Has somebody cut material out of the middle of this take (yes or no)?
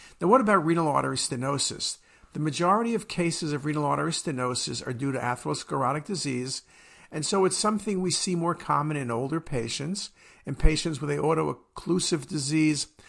no